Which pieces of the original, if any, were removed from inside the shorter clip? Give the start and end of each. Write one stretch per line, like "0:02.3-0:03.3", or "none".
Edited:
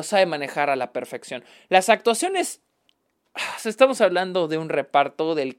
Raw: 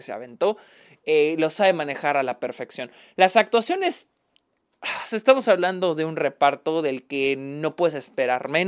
none